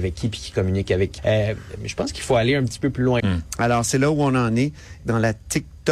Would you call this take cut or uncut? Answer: cut